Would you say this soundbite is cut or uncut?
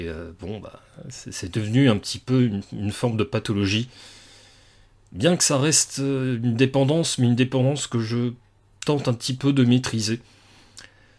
uncut